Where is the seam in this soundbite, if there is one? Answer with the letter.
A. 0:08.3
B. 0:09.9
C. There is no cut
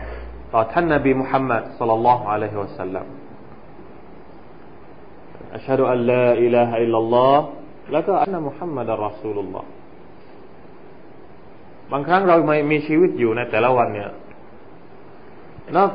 A